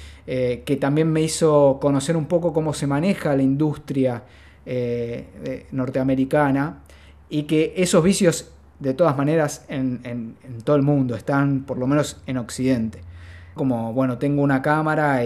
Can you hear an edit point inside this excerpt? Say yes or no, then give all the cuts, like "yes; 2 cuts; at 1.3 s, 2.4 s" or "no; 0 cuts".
yes; 1 cut; at 13.6 s